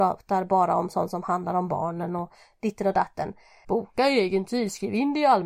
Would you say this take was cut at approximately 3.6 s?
yes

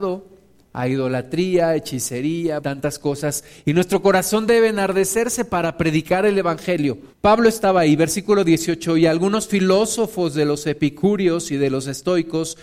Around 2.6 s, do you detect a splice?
yes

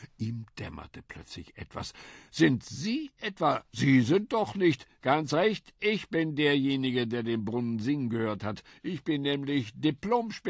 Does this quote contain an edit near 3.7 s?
no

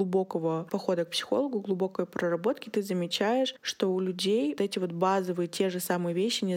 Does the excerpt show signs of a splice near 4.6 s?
yes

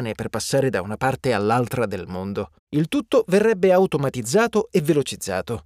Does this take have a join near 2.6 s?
yes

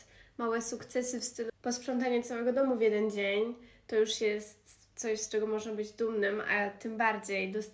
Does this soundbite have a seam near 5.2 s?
no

